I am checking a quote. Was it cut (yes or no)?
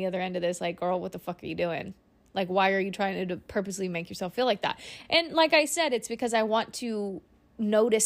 no